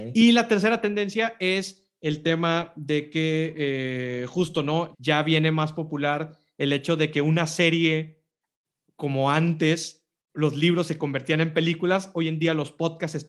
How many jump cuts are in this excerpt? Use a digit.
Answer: 1